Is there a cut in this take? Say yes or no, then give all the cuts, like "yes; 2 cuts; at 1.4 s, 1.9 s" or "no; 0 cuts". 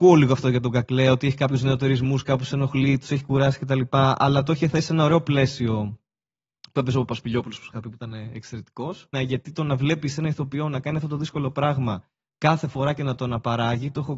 yes; 1 cut; at 9.1 s